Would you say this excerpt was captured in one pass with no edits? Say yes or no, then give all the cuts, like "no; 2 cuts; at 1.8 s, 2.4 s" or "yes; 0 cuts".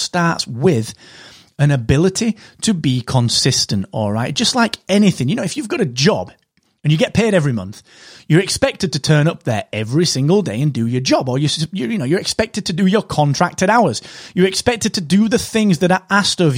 yes; 0 cuts